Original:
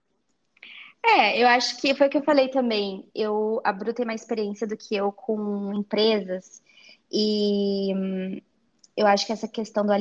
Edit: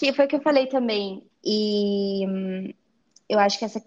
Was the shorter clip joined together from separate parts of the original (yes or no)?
yes